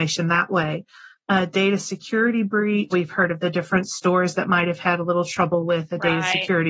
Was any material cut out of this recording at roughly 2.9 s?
yes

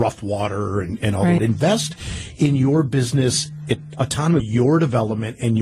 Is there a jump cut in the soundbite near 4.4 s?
yes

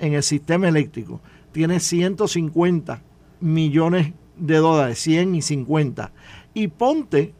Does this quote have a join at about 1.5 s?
no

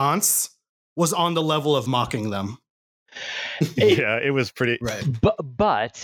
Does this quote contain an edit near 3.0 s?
no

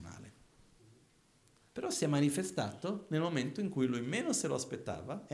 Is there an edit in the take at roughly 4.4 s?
no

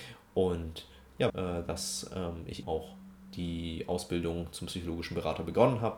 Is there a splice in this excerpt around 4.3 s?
no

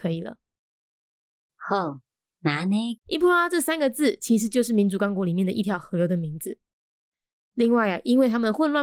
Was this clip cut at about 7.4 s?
no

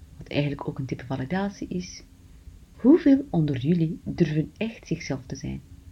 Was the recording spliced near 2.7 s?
yes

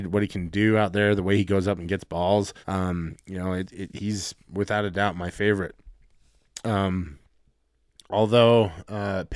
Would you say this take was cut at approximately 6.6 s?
no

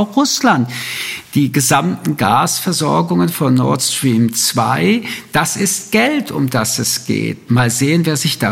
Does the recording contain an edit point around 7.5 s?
yes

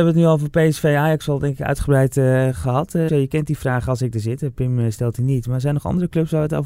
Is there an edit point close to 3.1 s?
yes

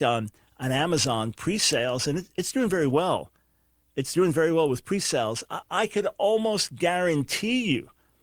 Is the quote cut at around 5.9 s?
no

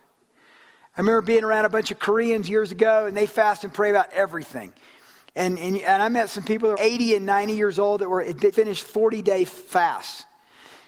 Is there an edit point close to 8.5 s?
yes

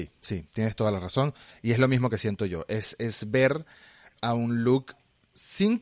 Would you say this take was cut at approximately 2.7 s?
no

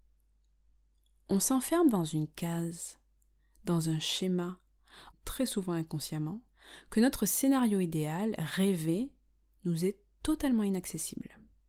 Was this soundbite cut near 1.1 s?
no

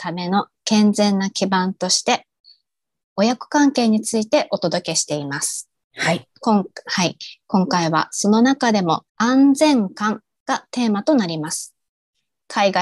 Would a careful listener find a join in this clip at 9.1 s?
yes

